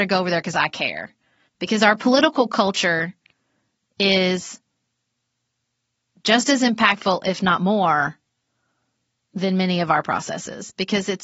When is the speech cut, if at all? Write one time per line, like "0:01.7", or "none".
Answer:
0:01.5